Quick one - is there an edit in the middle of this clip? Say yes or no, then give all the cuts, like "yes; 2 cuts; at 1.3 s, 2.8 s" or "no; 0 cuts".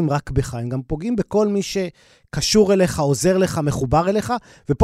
no; 0 cuts